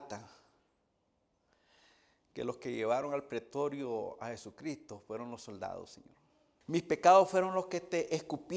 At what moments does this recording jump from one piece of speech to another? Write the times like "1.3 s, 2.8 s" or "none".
6.6 s